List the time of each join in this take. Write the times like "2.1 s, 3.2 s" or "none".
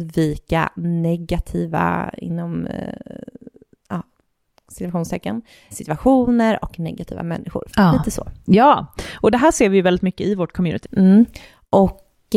5.7 s, 7.7 s, 10.8 s